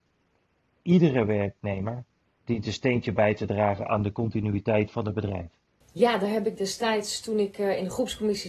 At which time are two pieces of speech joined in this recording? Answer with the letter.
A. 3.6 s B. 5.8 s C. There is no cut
B